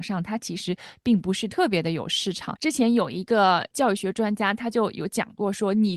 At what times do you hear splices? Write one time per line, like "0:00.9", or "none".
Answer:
0:02.6